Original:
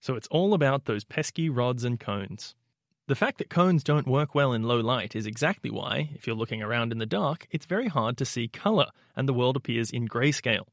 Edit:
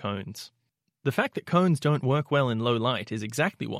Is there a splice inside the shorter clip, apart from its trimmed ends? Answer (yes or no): no